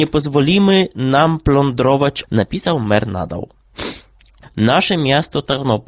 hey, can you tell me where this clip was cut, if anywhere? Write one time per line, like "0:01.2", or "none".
0:02.2
0:04.4